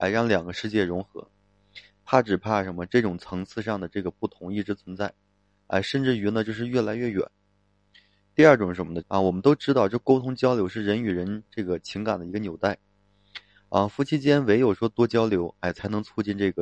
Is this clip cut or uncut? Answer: cut